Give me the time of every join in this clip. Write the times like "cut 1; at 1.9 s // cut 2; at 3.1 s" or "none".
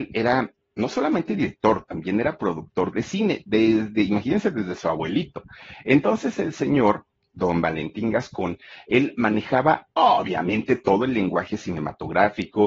none